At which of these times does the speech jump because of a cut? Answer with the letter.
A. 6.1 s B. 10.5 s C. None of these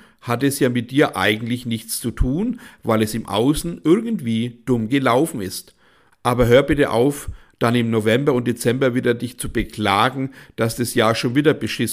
A